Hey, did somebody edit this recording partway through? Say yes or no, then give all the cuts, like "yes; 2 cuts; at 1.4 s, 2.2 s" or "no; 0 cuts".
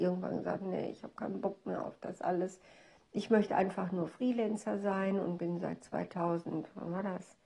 no; 0 cuts